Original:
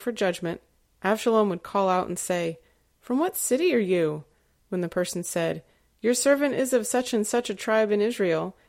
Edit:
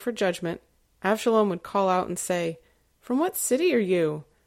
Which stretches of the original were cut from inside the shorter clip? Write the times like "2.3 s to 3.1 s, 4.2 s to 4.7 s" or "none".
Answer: none